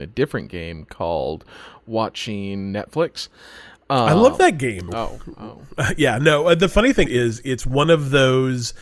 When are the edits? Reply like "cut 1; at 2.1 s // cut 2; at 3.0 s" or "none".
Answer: cut 1; at 4.9 s // cut 2; at 7.1 s

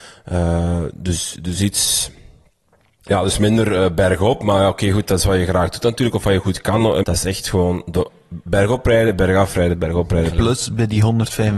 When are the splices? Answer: cut 1; at 7.0 s // cut 2; at 10.3 s

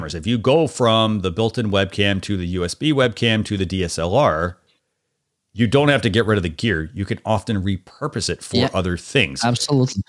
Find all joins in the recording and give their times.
none

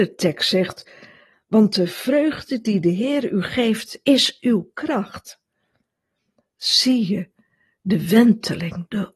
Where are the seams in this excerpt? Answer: cut 1; at 1.3 s

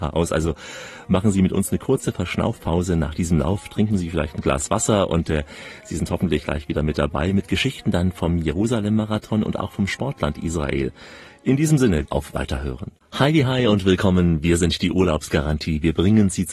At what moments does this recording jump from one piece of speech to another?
cut 1; at 12.1 s

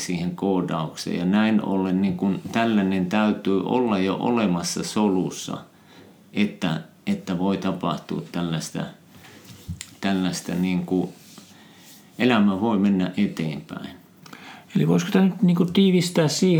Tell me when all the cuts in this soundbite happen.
none

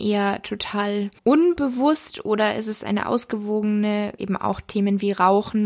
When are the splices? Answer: cut 1; at 1.2 s // cut 2; at 4.2 s

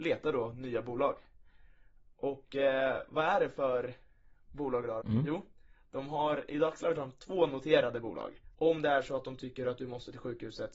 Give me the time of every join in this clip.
cut 1; at 5.0 s // cut 2; at 8.5 s

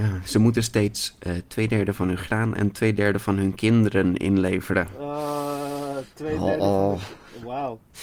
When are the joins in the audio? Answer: cut 1; at 1.5 s

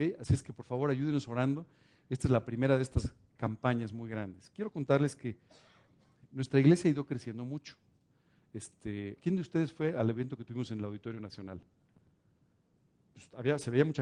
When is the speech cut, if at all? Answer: cut 1; at 9.2 s

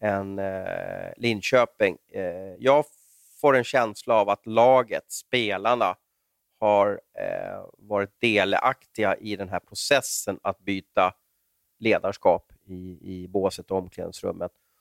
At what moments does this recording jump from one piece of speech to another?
none

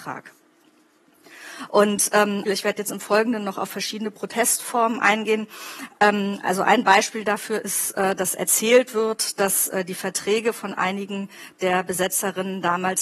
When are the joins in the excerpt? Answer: cut 1; at 2.5 s

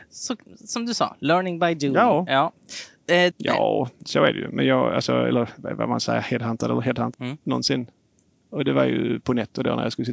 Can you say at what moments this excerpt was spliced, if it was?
cut 1; at 3.3 s // cut 2; at 7.1 s

